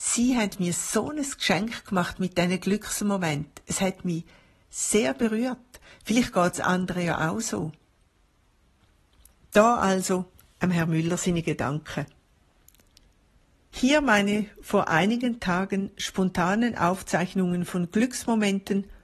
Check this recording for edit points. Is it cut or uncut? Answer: uncut